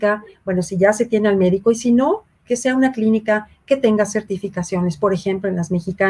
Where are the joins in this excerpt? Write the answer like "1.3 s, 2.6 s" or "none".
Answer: 2.4 s